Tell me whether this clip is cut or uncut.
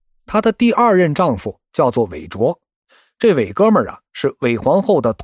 uncut